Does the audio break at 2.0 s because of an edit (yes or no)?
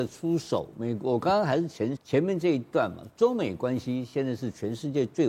yes